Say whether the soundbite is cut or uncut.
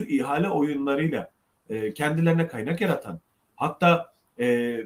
uncut